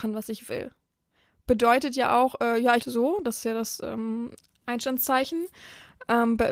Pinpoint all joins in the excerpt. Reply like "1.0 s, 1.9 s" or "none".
2.8 s